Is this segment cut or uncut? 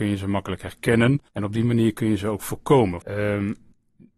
cut